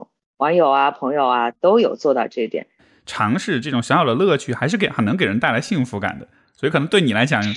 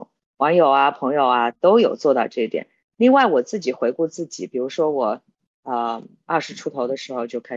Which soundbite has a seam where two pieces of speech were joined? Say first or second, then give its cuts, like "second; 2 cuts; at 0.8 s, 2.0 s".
first; 1 cut; at 2.8 s